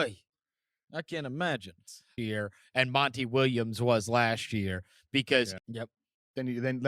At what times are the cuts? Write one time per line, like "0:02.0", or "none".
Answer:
0:02.2
0:05.6